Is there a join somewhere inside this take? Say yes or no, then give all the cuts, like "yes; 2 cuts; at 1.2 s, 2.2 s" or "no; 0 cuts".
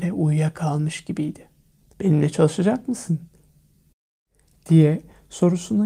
yes; 1 cut; at 1.9 s